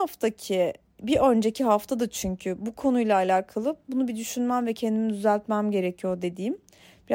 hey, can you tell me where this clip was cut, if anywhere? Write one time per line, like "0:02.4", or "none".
0:01.0